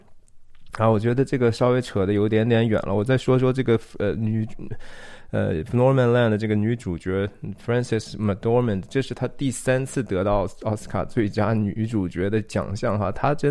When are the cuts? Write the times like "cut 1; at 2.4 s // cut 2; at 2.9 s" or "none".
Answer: none